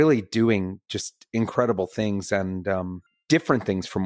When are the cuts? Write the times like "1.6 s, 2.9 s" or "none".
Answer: none